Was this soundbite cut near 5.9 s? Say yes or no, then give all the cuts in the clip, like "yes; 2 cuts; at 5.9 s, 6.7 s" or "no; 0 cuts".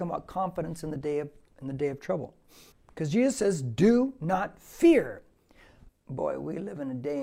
yes; 2 cuts; at 2.7 s, 5.9 s